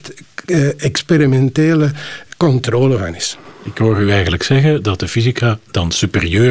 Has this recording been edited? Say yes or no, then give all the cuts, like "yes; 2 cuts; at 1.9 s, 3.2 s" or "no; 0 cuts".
no; 0 cuts